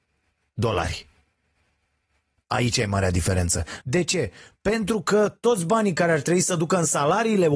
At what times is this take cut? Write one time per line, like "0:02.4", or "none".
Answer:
0:03.8